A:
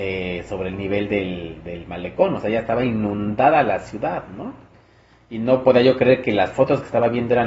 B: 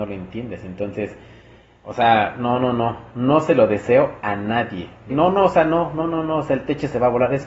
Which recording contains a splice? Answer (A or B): B